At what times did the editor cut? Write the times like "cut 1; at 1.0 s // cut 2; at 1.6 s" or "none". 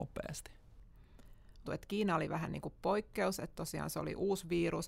cut 1; at 1.7 s

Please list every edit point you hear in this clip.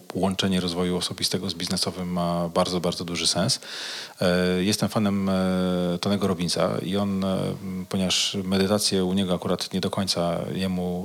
none

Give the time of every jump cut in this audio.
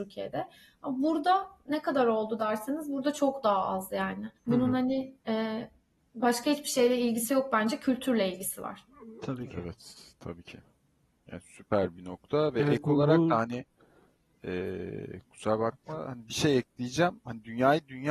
cut 1; at 4.4 s

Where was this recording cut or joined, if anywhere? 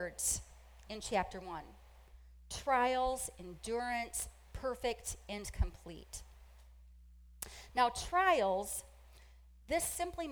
none

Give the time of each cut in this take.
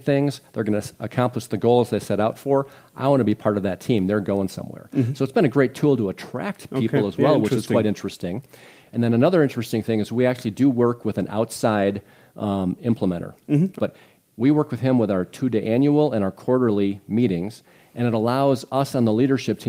cut 1; at 13.8 s

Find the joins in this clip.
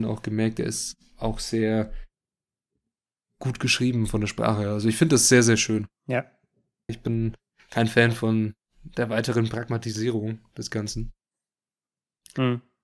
cut 1; at 6.9 s

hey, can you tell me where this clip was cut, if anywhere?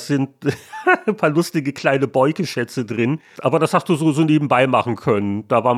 cut 1; at 3.4 s

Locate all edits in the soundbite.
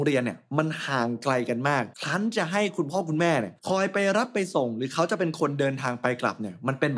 cut 1; at 1.9 s // cut 2; at 3.6 s

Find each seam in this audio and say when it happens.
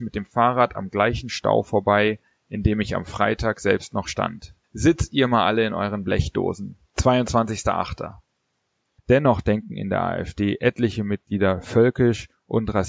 cut 1; at 4.6 s // cut 2; at 6.9 s // cut 3; at 9.0 s

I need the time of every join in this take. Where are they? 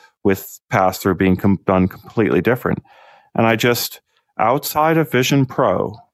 none

